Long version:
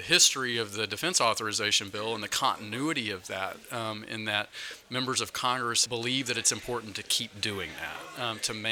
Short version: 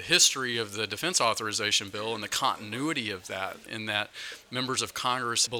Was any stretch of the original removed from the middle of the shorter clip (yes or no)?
yes